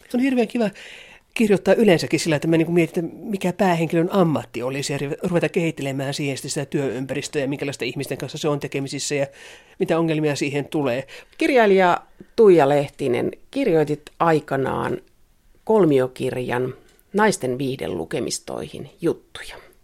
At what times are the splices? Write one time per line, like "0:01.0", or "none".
0:11.2